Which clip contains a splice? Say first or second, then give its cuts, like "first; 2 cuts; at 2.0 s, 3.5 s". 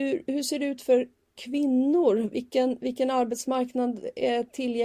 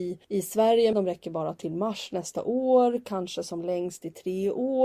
second; 1 cut; at 0.9 s